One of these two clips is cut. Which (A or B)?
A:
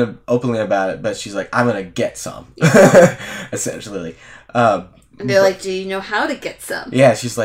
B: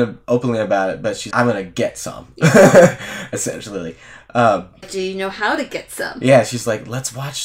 B